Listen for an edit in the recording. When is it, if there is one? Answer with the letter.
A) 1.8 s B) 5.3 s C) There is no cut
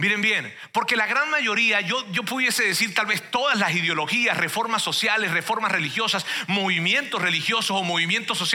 C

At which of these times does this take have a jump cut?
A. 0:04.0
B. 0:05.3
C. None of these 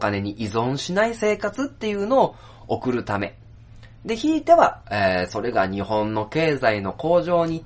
C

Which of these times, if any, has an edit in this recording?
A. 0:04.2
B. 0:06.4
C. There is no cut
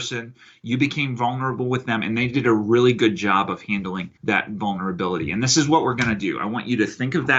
A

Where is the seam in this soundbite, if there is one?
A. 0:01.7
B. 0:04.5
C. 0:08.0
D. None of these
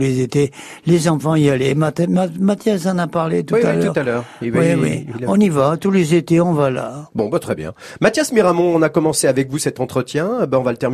D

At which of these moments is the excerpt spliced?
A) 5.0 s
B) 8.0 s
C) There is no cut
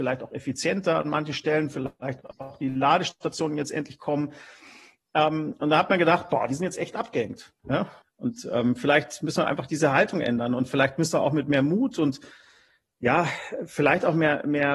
B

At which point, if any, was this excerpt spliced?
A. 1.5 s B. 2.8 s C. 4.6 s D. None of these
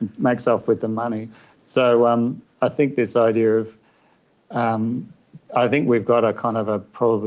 A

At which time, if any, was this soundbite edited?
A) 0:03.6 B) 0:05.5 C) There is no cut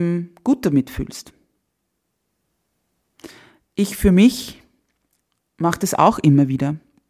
C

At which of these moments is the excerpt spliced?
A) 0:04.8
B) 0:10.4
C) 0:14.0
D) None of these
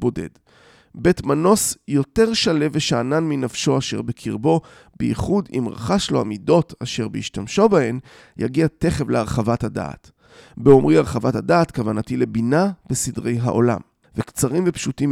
C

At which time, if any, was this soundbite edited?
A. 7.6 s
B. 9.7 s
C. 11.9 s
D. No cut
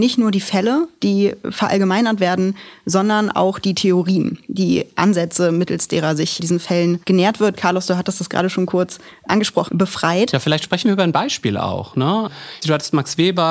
B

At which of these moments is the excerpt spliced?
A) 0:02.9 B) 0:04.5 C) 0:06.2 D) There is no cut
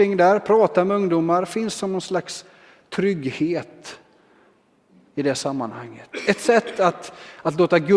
D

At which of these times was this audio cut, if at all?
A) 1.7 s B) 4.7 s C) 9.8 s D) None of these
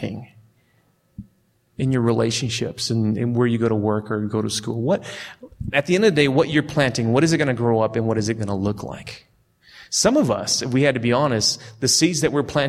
A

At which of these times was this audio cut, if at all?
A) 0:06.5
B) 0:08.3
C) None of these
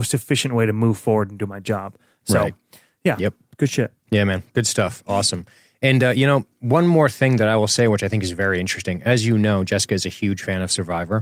C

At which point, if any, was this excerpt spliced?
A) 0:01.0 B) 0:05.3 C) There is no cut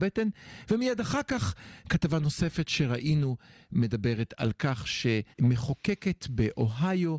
B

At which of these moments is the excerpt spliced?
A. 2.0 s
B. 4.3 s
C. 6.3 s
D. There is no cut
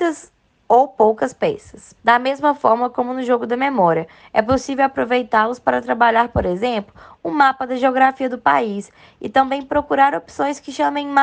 A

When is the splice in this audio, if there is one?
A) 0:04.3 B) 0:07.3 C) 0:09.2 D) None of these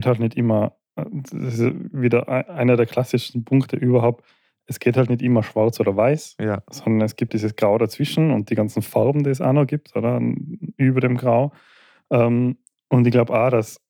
B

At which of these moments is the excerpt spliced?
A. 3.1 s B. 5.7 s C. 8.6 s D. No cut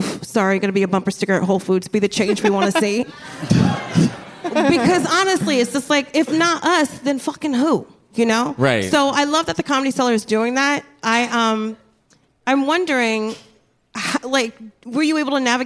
D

